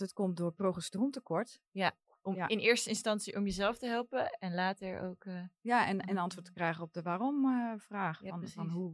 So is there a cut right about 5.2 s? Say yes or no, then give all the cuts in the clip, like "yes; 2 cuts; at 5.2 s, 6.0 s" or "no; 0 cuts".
no; 1 cut; at 1.7 s